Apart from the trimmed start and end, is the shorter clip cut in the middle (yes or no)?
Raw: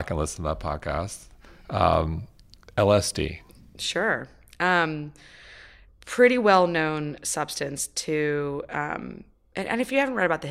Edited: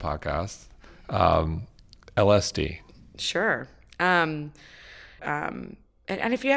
yes